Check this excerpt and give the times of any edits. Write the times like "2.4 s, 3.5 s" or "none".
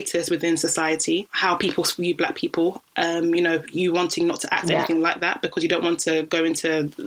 1.3 s